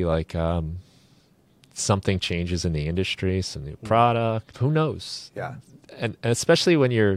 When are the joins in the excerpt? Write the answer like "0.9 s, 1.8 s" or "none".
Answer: 4.5 s